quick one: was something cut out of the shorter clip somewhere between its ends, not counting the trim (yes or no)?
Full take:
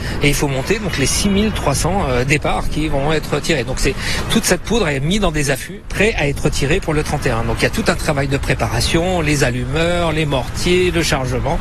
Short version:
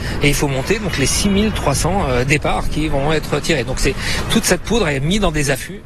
no